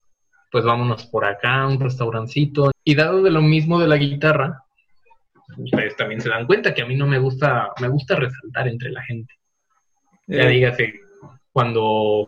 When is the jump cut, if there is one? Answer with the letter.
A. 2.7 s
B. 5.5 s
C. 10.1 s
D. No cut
A